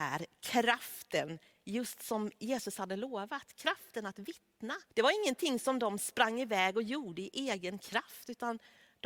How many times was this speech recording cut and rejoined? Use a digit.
1